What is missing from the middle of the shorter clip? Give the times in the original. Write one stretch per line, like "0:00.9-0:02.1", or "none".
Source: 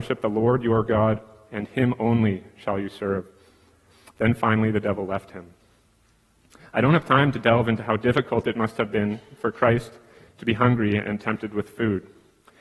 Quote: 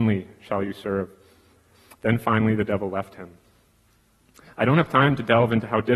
none